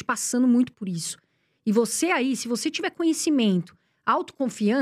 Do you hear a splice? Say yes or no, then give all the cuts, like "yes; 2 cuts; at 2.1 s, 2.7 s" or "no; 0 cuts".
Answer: no; 0 cuts